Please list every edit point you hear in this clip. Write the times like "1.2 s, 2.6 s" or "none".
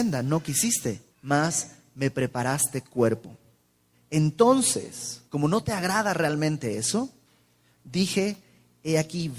1.1 s, 3.9 s, 5.3 s